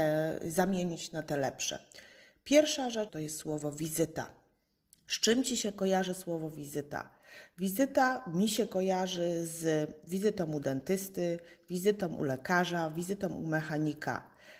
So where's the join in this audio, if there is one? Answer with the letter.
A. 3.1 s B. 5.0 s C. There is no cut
A